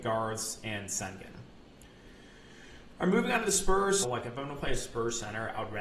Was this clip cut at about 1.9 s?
no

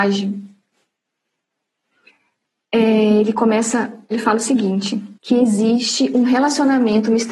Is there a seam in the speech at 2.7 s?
no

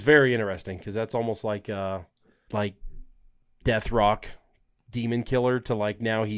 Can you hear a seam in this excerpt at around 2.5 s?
yes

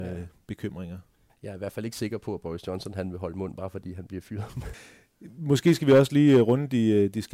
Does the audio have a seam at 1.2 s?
no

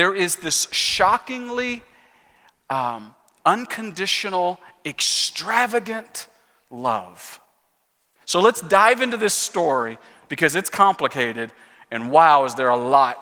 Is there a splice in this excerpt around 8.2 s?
yes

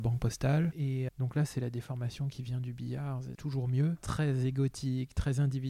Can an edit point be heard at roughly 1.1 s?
yes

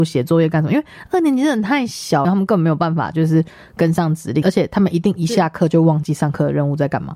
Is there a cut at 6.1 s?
no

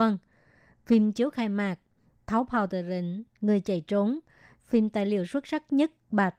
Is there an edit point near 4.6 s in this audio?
yes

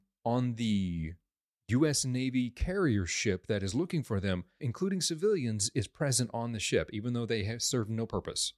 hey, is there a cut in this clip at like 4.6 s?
yes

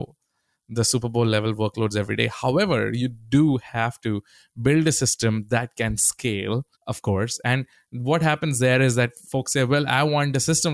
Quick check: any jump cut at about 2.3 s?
no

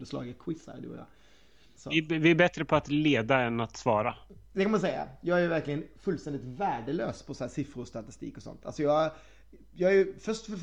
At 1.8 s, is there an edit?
yes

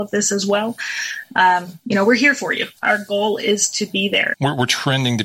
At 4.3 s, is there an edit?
yes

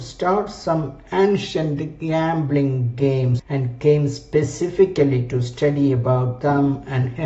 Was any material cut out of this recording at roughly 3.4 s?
yes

